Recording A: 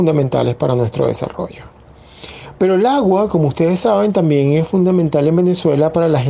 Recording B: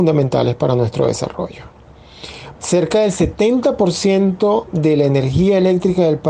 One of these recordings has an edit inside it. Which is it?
B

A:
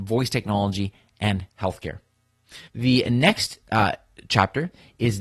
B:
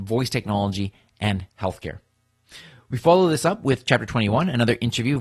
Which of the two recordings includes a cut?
A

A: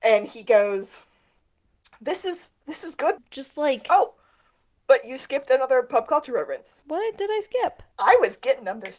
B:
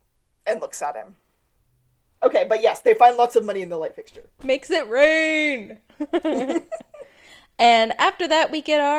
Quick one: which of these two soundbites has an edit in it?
A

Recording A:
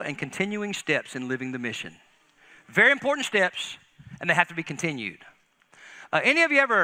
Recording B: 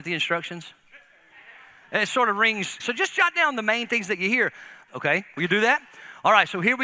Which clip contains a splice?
B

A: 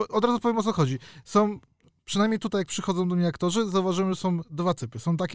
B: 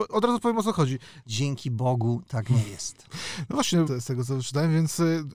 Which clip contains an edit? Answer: B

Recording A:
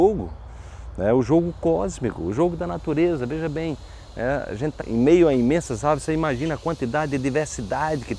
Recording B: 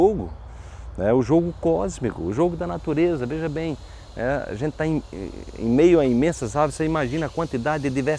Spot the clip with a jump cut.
A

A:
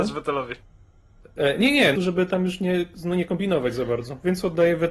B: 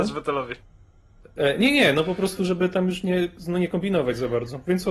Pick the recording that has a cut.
A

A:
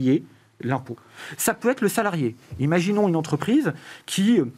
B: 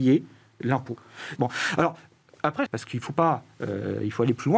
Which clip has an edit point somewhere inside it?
B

